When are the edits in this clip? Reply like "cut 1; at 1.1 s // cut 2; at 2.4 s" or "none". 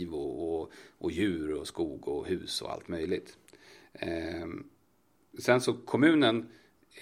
none